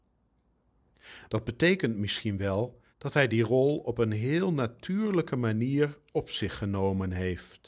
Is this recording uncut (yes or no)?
no